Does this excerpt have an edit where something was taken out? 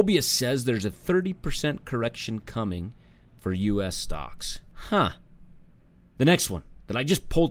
no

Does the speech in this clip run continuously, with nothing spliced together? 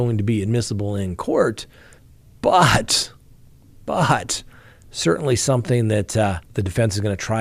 yes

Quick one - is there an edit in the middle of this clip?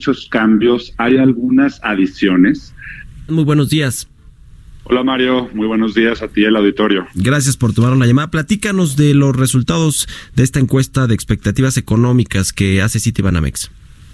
yes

